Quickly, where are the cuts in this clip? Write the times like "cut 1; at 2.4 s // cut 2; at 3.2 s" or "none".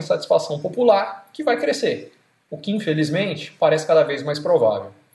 cut 1; at 2.5 s